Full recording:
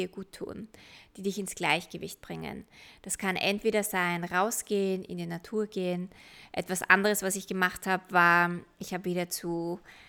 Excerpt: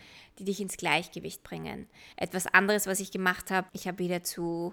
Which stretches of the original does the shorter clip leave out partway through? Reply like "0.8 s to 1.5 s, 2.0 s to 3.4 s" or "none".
2.9 s to 6.5 s, 8.0 s to 8.7 s